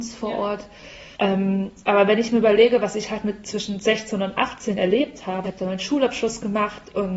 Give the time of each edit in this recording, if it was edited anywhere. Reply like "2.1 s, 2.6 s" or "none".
1.1 s, 5.4 s